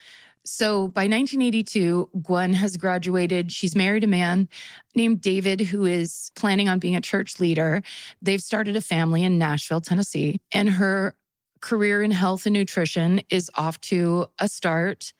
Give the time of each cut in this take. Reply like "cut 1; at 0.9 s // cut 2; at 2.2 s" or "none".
none